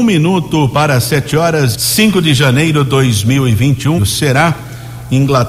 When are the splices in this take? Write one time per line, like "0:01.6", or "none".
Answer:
0:01.7
0:04.0

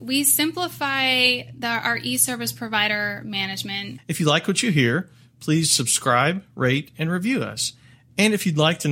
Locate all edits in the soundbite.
0:04.0

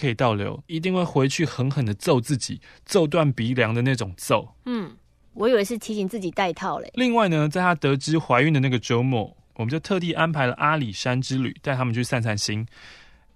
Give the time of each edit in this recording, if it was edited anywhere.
0:06.9
0:09.5

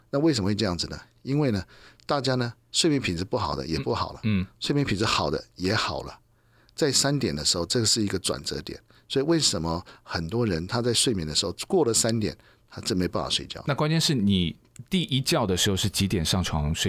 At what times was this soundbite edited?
none

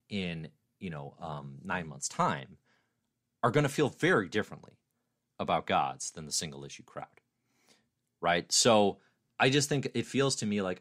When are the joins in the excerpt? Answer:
none

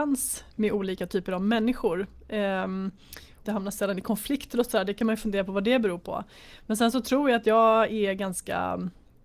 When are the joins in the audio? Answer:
0:03.4

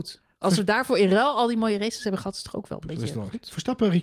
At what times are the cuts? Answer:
none

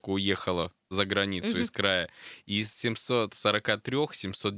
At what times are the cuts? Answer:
0:00.9

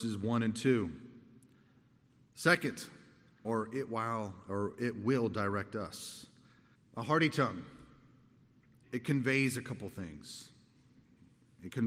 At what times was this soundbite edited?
0:03.4
0:06.7
0:08.8

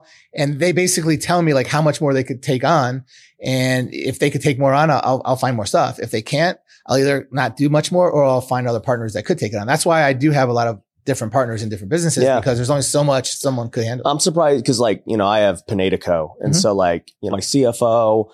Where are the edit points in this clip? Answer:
0:17.3

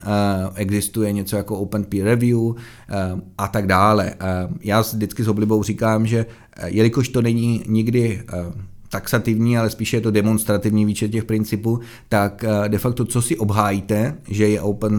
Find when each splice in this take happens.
none

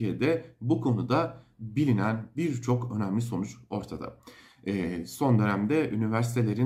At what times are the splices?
0:04.5

